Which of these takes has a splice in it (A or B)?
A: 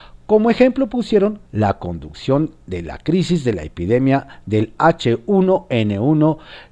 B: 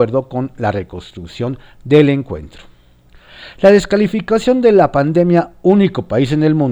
A